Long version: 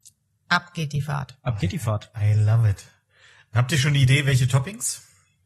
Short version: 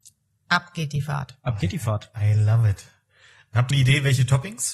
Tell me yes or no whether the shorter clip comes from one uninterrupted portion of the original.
no